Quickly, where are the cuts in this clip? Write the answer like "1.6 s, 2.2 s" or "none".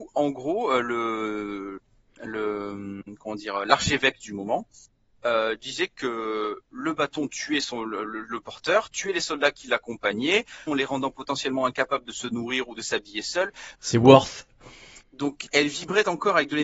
10.7 s, 13.7 s, 15.0 s